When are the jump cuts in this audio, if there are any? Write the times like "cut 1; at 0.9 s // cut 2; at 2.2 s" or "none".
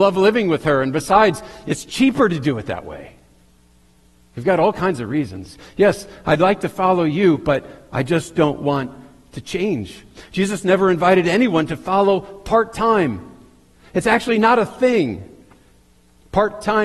none